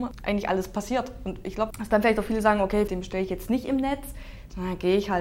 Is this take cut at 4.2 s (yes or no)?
no